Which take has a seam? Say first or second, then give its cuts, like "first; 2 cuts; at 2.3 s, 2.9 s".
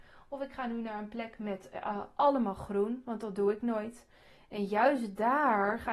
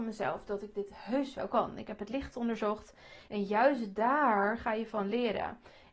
second; 1 cut; at 3.2 s